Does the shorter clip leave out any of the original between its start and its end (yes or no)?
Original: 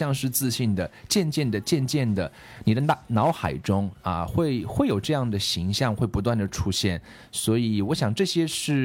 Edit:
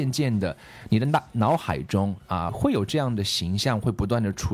yes